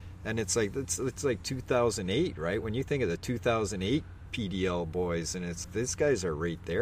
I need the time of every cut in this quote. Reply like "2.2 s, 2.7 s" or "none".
5.6 s